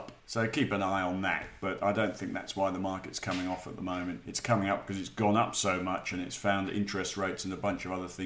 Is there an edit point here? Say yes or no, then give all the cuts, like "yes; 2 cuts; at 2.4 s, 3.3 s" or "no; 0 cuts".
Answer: no; 0 cuts